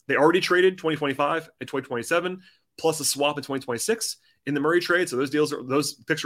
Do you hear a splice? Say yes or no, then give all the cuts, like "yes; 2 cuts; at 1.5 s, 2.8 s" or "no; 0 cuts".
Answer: no; 0 cuts